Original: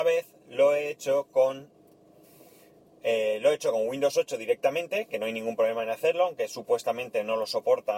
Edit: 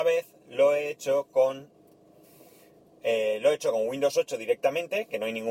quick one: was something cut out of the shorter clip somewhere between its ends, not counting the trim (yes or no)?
no